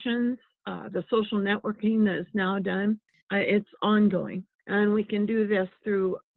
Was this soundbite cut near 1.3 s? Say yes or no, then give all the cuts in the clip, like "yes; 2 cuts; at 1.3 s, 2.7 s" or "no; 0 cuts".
no; 2 cuts; at 3.2 s, 4.6 s